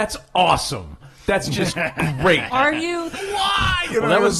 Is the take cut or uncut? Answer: cut